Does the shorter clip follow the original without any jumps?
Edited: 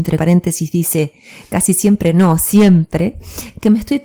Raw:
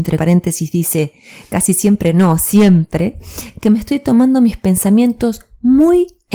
yes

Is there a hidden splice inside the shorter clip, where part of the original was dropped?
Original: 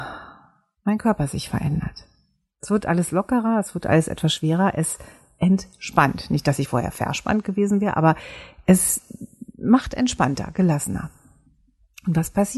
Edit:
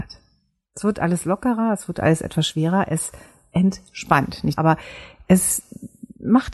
yes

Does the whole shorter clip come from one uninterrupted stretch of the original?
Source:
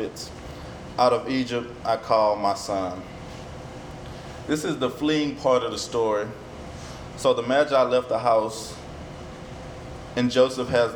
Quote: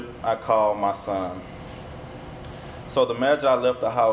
no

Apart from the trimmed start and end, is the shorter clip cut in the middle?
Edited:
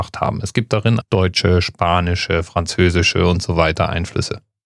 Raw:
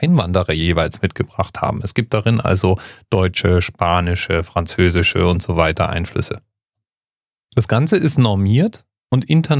yes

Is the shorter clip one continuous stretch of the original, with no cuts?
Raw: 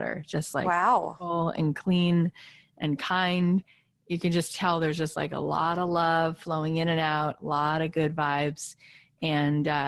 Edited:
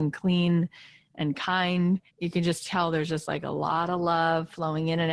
no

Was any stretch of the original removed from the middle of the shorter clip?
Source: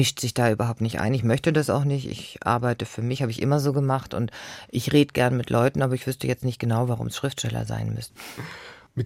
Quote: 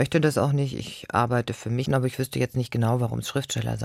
yes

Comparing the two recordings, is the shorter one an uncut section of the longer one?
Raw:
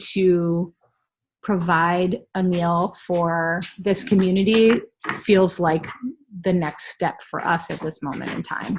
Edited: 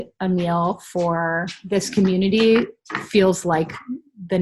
yes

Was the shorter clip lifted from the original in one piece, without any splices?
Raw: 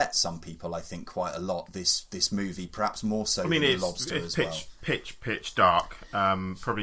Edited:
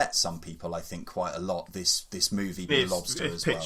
no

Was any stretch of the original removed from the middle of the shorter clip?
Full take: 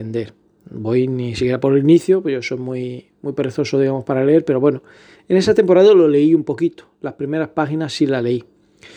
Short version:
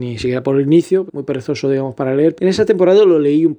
yes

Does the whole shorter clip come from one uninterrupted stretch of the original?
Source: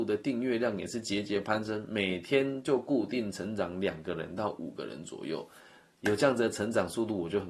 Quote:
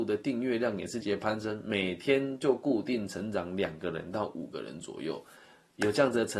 no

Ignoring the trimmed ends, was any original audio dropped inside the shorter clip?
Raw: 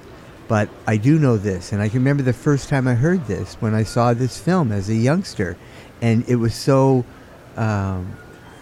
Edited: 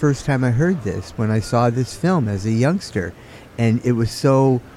no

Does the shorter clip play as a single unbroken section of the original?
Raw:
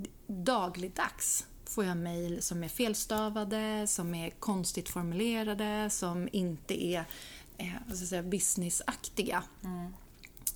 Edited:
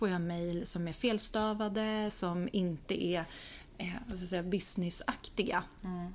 no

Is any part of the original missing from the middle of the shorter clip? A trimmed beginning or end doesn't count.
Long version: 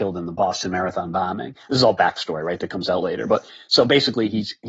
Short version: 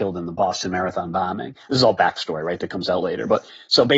no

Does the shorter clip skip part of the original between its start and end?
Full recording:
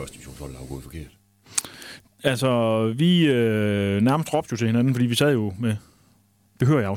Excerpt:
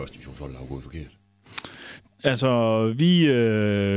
no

